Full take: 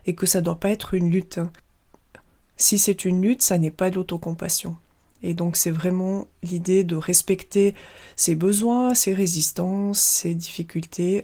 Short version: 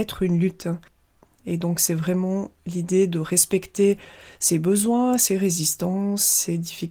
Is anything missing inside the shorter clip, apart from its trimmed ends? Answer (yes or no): yes